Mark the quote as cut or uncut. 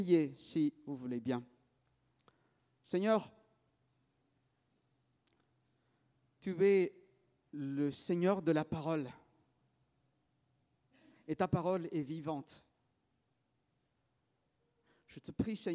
uncut